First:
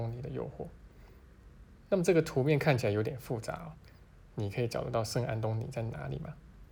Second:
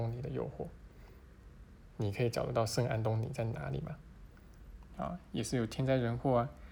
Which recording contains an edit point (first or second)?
second